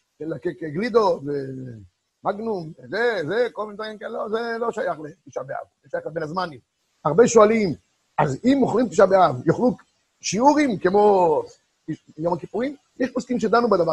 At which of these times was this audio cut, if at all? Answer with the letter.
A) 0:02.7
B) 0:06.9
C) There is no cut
B